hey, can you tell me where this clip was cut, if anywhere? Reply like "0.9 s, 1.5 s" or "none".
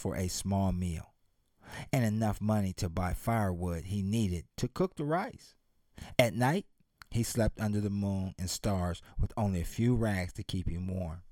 none

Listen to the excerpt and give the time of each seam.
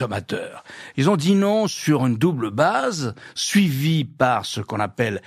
0.9 s

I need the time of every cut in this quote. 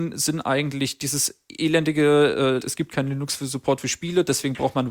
2.6 s

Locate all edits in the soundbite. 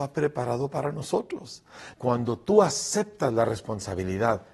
1.9 s

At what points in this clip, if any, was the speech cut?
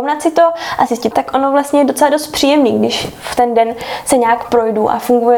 1.1 s

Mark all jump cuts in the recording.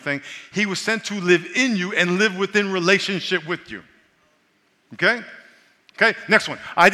none

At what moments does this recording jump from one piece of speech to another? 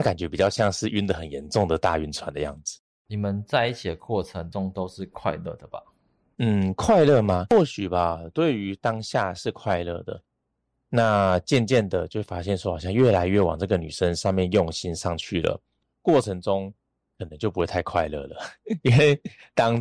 none

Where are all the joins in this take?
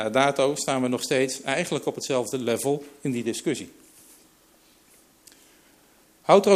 none

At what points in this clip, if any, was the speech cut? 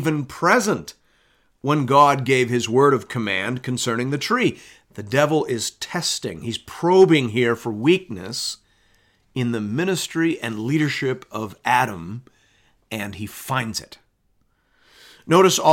4.8 s

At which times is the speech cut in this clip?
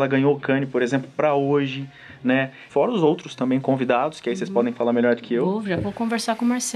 2.7 s

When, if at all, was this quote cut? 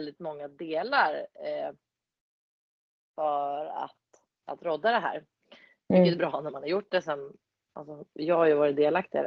none

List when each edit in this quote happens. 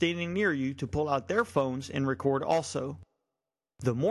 none

